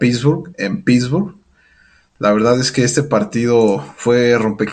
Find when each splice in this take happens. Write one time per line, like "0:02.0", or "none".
none